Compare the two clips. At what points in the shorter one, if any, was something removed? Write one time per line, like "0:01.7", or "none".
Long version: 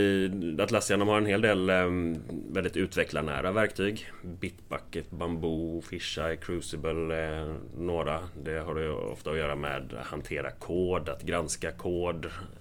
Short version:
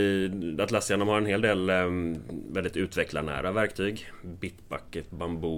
none